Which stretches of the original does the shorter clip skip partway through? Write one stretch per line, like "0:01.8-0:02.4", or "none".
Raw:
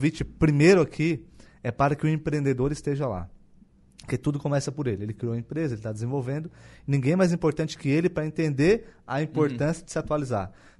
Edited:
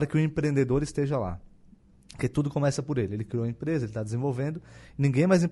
none